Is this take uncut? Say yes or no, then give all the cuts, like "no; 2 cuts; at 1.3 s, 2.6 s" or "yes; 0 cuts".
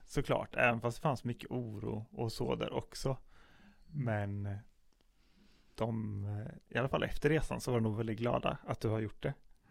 yes; 0 cuts